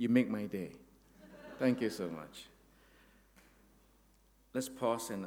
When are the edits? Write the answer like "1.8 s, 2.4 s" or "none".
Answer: none